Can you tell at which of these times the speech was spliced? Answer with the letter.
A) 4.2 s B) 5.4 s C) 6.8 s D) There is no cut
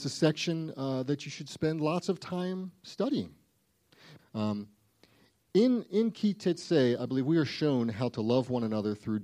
A